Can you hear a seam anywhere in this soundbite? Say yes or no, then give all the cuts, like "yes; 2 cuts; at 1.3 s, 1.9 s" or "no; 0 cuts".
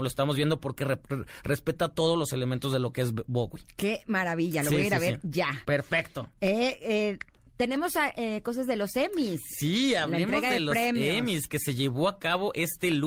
no; 0 cuts